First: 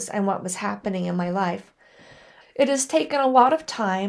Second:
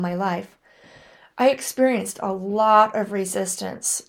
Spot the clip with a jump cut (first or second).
first